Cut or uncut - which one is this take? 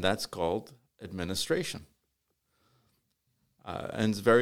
uncut